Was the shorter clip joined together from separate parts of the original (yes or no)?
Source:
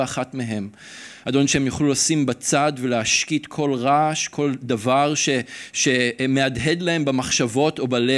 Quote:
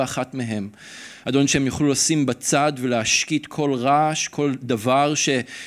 no